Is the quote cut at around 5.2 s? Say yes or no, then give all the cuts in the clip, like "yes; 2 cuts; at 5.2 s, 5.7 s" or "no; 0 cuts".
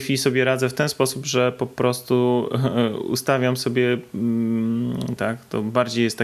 yes; 1 cut; at 5.2 s